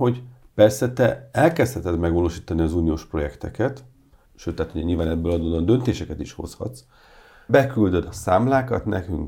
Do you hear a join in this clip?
yes; 2 cuts; at 4.3 s, 7.5 s

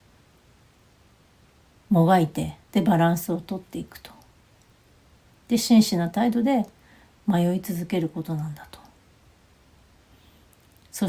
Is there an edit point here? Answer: yes; 1 cut; at 2.6 s

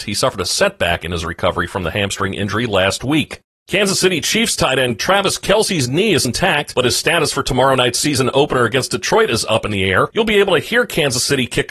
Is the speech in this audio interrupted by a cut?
yes; 2 cuts; at 6.2 s, 10.1 s

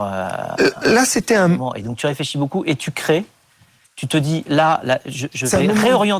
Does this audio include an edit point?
no; 0 cuts

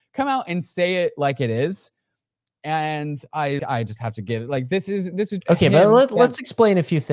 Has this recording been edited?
yes; 2 cuts; at 3.6 s, 5.4 s

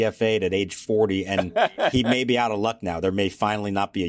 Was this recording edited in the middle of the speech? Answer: no; 0 cuts

